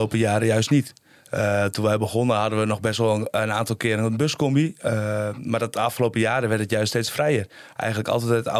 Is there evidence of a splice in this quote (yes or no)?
no